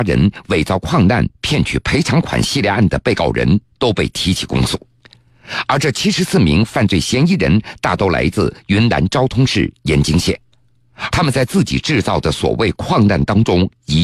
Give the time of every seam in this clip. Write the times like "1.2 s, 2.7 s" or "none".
11.1 s

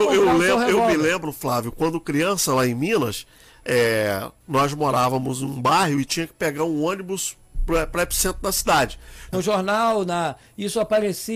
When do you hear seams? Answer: 9.3 s

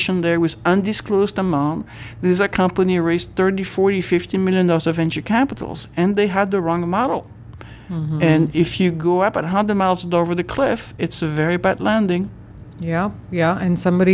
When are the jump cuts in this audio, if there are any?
none

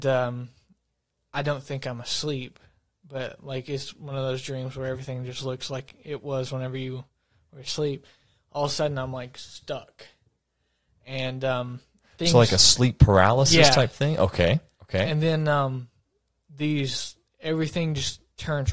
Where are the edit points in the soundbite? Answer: none

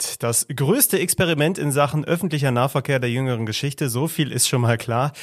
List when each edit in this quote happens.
none

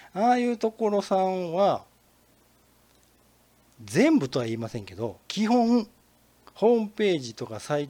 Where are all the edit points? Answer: 5.2 s

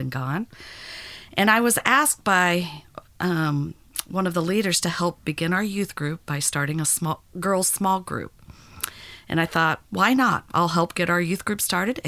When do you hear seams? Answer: 9.8 s

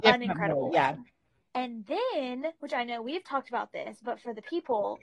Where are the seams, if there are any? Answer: 1.5 s, 2.6 s

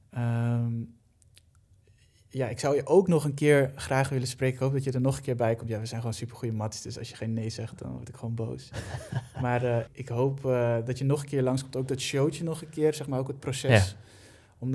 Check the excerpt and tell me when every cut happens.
9.9 s

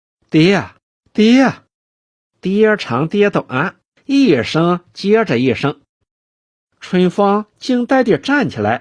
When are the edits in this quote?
6.0 s

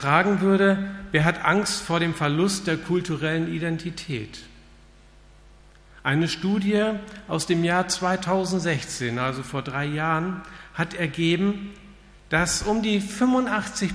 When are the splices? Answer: none

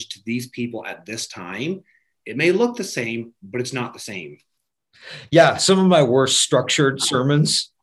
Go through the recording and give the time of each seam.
none

